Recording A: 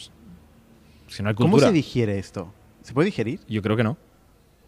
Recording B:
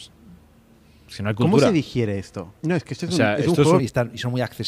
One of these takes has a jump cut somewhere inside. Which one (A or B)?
B